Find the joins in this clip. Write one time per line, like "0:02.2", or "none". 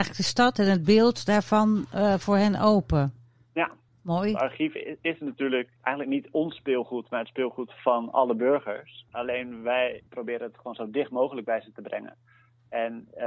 none